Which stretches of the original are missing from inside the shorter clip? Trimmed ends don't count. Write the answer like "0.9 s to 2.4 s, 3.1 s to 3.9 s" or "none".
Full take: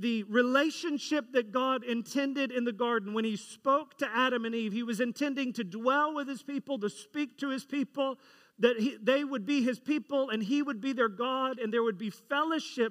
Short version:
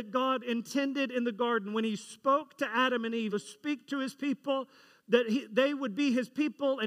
4.7 s to 6.8 s